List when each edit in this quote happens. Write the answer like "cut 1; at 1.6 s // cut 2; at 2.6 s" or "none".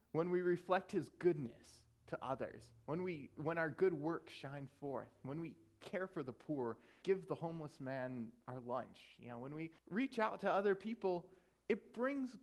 cut 1; at 7.0 s // cut 2; at 9.8 s